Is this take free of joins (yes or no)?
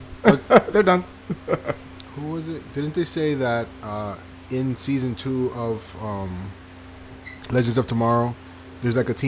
no